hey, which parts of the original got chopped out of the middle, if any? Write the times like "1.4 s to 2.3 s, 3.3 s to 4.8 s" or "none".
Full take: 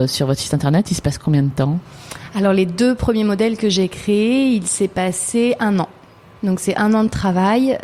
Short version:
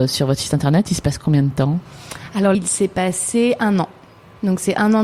2.5 s to 4.5 s